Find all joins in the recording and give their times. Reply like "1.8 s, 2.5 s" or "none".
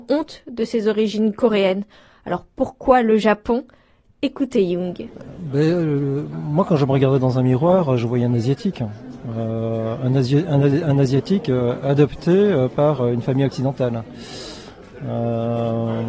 none